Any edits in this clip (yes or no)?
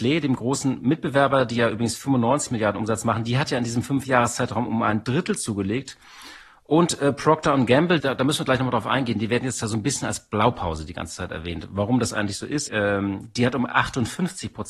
yes